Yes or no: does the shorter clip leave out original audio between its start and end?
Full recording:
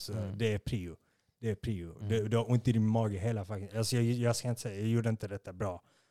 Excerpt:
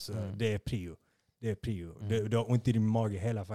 no